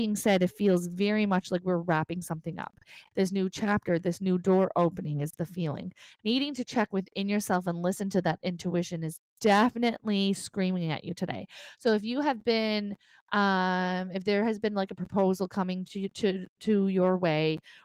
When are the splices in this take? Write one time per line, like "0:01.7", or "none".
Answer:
0:03.1

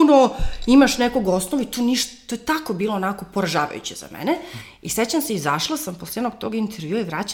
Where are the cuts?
none

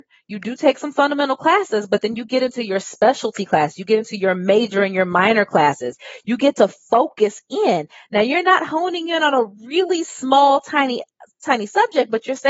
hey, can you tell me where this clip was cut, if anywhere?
none

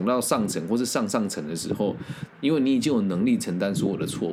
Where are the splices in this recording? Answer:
0:02.3

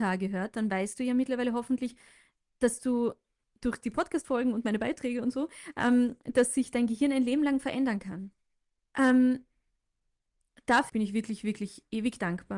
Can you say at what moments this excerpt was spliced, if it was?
0:08.8
0:10.9

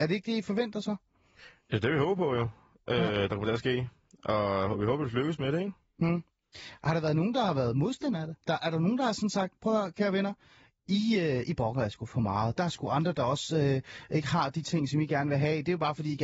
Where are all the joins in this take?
none

